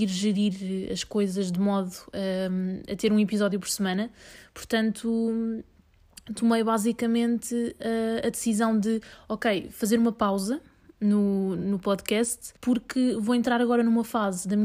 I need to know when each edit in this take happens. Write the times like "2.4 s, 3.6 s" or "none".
12.6 s